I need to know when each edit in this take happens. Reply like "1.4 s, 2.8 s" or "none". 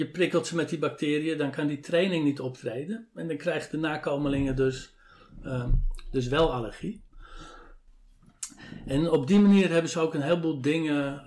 none

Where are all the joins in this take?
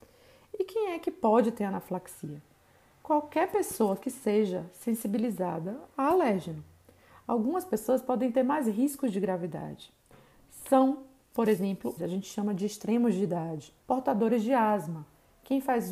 12.0 s, 13.8 s

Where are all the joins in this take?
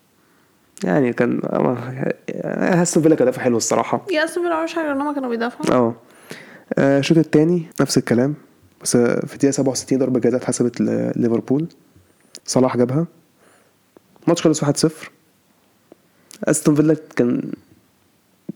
7.7 s, 12.4 s

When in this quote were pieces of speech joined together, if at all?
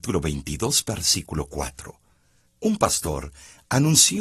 2.5 s

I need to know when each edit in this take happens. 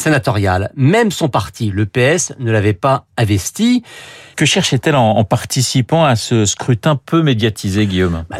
4.3 s

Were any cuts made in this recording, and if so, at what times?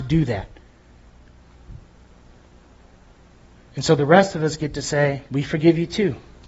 5.3 s

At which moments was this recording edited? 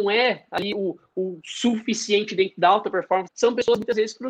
3.3 s

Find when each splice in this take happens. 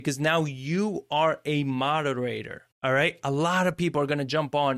2.7 s

